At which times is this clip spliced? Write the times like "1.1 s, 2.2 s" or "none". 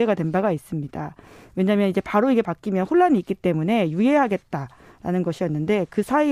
none